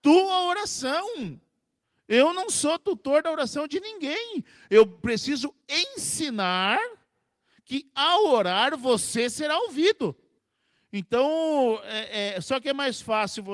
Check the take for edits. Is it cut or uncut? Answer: uncut